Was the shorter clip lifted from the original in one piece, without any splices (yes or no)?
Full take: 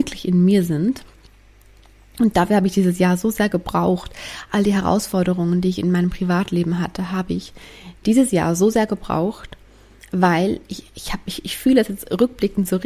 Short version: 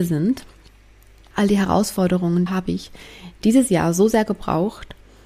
no